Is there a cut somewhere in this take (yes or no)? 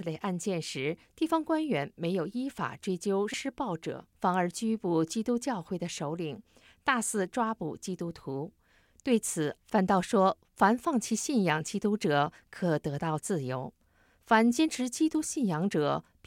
yes